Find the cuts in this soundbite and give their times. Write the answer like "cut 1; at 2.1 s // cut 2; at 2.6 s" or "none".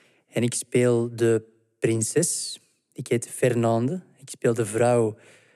none